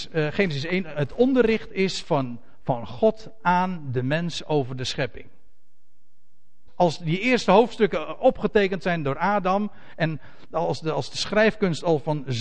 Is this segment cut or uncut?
cut